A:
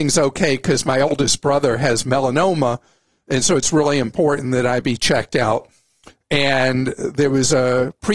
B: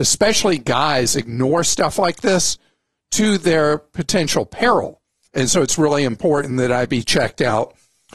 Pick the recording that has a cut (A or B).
B